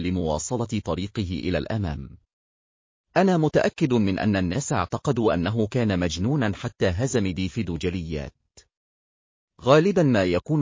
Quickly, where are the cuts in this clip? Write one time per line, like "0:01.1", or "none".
none